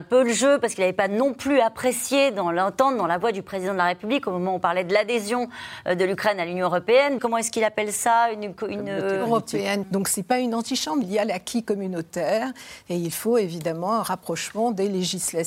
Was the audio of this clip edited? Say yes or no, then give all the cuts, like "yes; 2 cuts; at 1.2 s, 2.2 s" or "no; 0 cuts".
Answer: yes; 3 cuts; at 7.2 s, 9.8 s, 11.0 s